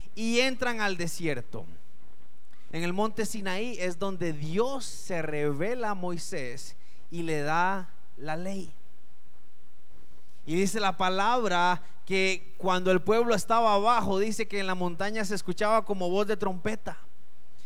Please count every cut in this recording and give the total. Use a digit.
1